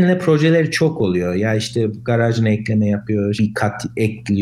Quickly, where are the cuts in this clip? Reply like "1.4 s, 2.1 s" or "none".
3.4 s